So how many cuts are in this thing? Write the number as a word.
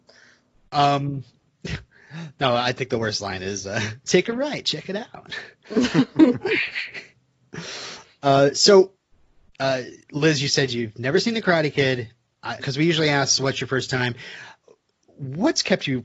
one